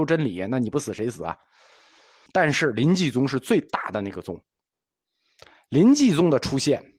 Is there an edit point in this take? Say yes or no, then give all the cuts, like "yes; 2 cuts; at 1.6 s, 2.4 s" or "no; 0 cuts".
yes; 1 cut; at 2.3 s